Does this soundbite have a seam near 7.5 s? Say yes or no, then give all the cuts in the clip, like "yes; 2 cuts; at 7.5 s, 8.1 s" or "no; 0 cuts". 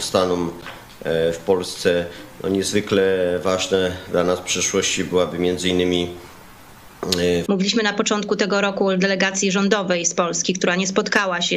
yes; 1 cut; at 7.5 s